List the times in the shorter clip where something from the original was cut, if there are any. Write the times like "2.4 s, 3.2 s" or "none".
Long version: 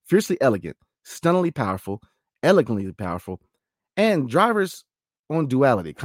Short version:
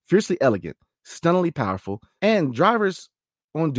2.2 s